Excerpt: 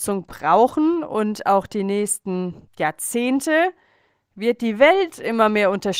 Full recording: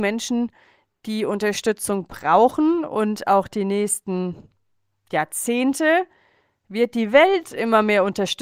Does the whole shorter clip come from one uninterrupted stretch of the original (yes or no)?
no